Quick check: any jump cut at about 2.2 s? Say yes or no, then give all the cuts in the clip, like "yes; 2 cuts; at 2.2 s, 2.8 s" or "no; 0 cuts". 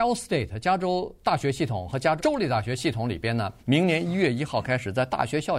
yes; 2 cuts; at 2.2 s, 3.6 s